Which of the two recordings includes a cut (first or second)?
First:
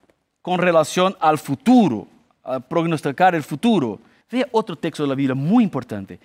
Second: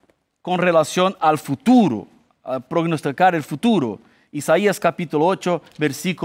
first